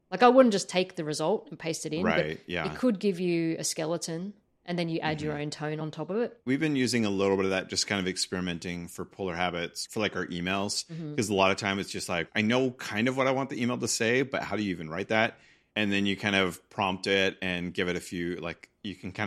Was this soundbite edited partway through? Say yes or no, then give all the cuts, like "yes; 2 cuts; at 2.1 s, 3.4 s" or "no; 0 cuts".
no; 0 cuts